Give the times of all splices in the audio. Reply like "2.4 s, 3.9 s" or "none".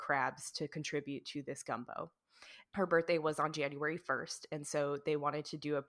2.6 s